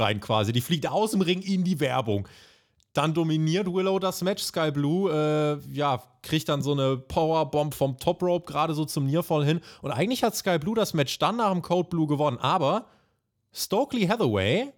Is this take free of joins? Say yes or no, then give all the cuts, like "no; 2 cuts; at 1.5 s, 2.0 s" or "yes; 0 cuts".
yes; 0 cuts